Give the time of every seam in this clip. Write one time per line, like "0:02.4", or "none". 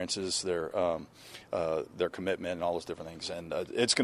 none